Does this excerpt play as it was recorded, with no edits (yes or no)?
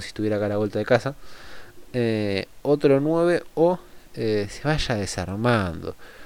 yes